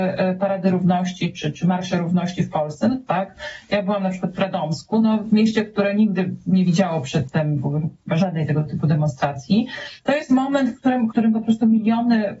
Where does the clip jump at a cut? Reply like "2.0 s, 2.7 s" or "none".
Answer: 3.1 s, 10.0 s, 11.1 s